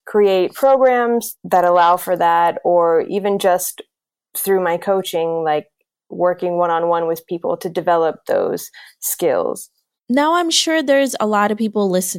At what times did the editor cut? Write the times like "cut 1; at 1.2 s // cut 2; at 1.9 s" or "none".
none